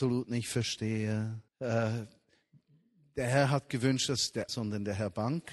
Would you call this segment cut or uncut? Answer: cut